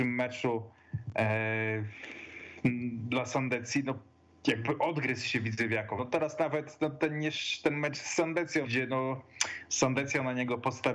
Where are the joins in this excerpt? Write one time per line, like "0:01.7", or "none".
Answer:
0:06.0
0:08.6